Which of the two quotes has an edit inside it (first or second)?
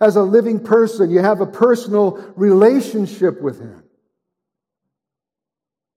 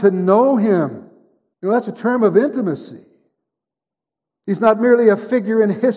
second